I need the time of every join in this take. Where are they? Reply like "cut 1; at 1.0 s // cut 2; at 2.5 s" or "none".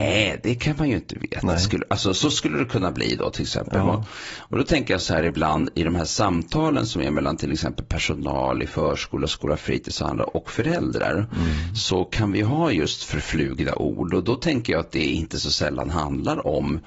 none